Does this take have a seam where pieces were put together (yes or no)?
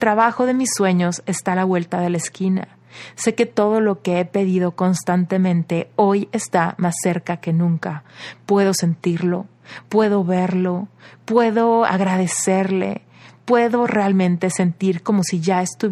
no